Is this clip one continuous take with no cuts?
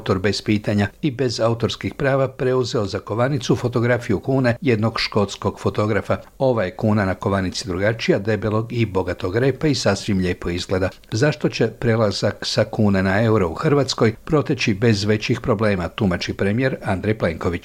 yes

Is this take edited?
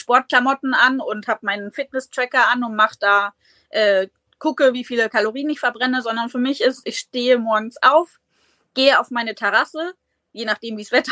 no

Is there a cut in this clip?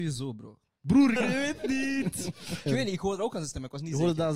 yes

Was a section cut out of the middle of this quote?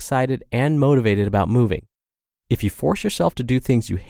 no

